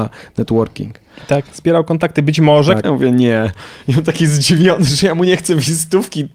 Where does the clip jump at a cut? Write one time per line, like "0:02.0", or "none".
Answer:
0:02.8